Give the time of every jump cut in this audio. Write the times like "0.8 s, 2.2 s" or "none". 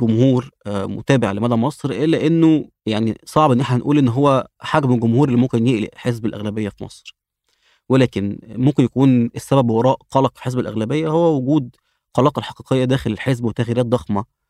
2.8 s